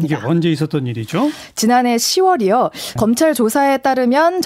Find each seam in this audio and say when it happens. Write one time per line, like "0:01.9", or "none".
0:03.0